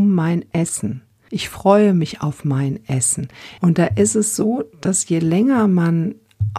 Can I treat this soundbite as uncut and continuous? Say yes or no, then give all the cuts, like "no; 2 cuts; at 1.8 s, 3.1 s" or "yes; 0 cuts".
no; 2 cuts; at 1.3 s, 3.6 s